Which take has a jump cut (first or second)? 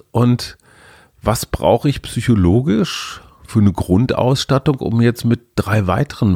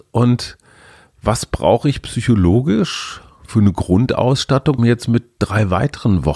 second